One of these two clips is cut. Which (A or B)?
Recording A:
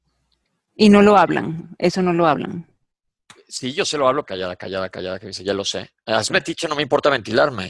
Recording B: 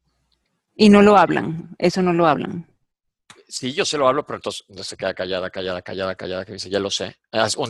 A